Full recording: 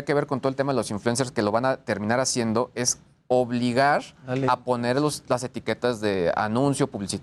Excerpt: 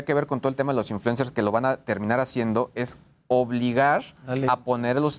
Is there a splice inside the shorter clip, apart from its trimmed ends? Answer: no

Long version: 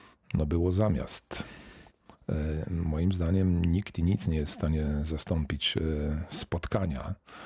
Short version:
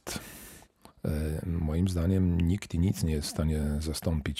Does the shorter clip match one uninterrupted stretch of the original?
yes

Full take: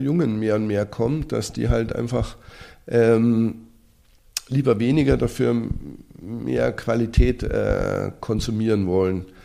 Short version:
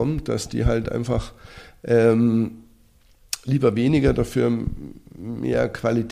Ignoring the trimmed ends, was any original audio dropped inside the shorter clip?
no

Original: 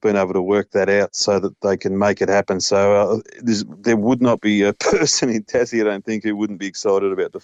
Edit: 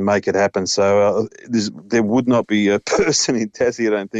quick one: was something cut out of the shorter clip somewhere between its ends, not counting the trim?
no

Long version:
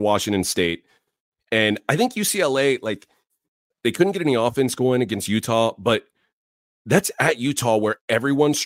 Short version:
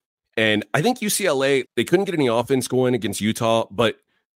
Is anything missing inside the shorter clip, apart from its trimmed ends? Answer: yes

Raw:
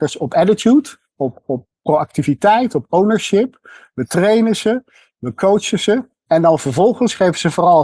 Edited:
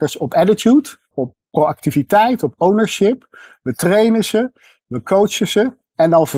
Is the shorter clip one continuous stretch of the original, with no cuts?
no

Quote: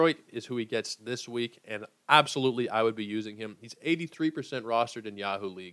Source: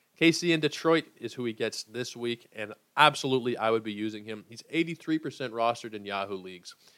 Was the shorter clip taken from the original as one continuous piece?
yes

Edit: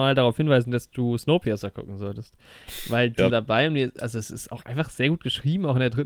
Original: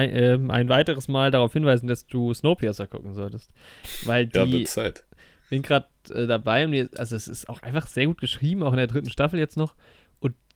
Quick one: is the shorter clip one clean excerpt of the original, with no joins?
no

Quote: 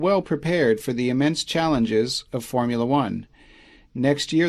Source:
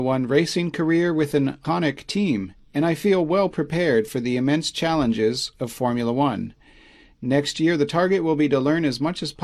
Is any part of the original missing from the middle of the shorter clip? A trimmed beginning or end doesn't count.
no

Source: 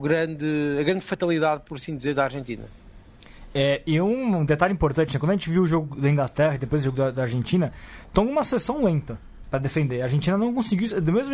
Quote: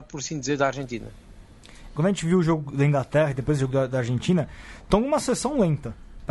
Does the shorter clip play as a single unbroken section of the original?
no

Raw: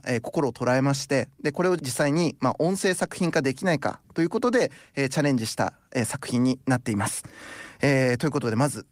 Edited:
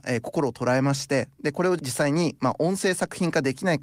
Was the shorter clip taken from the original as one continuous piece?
yes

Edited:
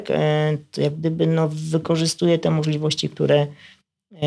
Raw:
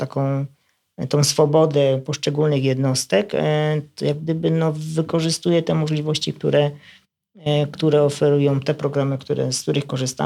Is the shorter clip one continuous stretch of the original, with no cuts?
yes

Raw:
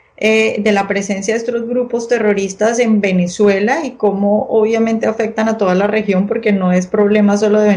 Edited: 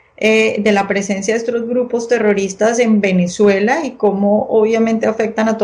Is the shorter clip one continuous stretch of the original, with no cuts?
yes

